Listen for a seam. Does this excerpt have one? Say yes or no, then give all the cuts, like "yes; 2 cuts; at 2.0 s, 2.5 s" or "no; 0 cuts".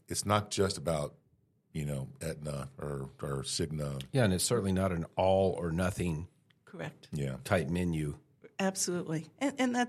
no; 0 cuts